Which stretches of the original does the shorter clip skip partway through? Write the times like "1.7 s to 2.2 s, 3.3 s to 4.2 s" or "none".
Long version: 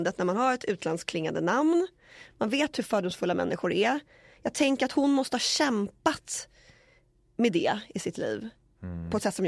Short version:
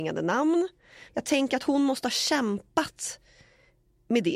2.3 s to 4.4 s